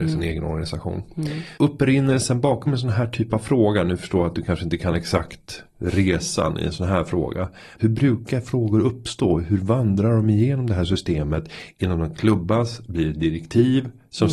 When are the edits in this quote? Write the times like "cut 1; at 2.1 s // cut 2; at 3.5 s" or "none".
cut 1; at 1.6 s // cut 2; at 7.8 s